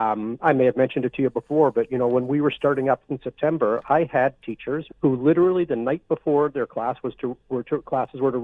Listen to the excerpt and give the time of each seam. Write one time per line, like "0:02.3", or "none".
0:04.9